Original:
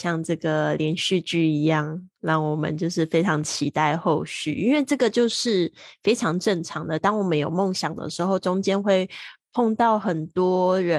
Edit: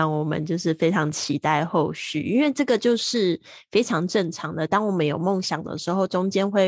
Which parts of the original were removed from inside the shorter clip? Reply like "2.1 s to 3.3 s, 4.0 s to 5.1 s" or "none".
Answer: none

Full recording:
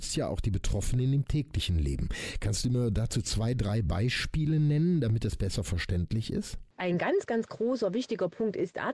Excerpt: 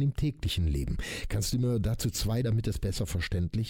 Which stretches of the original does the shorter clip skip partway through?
3.5 s to 5.0 s

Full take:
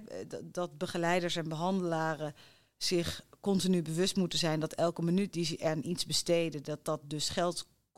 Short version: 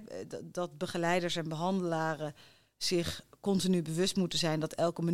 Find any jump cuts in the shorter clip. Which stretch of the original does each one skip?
none

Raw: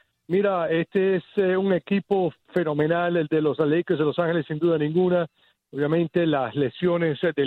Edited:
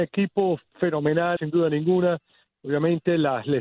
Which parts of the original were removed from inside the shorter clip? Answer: 3.1 s to 4.4 s

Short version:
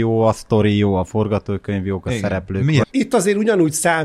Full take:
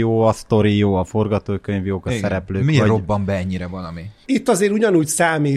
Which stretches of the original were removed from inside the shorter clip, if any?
2.8 s to 4.2 s

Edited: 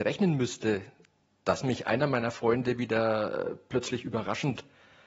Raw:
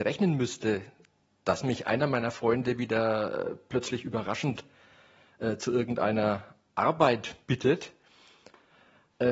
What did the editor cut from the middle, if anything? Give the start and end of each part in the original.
none

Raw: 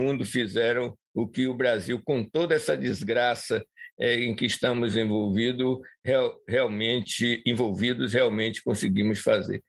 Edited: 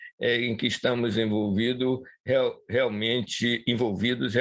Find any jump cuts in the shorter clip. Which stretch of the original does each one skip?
none

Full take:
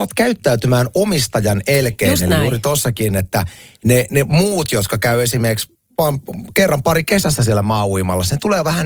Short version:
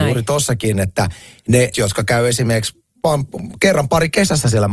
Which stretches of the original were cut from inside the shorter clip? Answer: 4.1 s to 4.7 s

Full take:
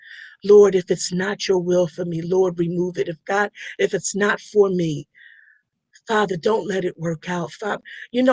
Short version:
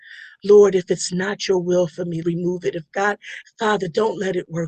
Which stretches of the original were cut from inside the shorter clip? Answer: 2.2 s to 2.6 s, 3.8 s to 5.9 s

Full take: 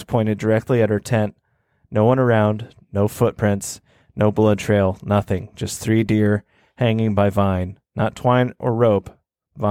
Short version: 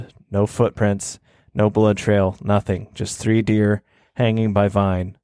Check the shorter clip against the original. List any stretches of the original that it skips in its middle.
none

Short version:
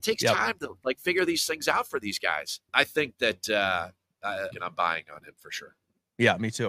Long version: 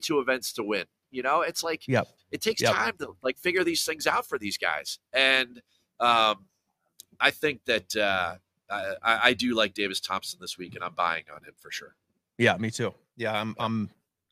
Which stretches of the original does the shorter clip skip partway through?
5.1 s to 7.2 s, 9.0 s to 10.7 s

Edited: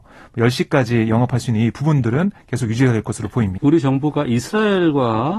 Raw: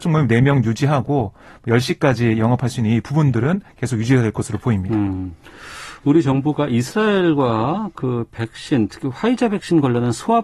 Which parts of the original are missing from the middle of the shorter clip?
4.9 s to 6.0 s

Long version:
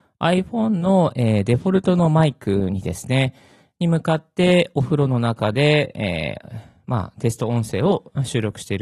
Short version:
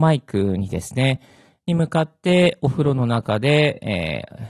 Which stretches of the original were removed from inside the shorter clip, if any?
none

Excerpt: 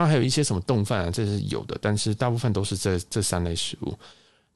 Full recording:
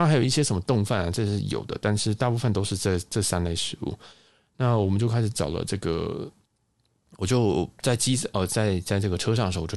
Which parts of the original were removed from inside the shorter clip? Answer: none

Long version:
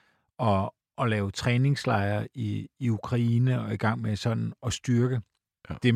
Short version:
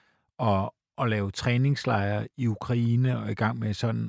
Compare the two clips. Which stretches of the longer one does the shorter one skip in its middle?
2.3 s to 2.7 s

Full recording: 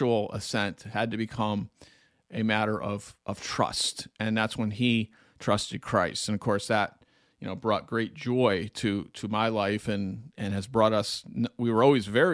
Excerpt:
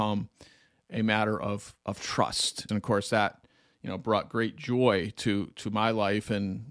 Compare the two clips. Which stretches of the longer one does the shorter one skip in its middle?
4.1 s to 6.3 s

